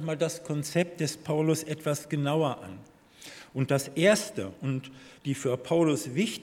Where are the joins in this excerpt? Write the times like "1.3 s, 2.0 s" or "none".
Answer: 5.2 s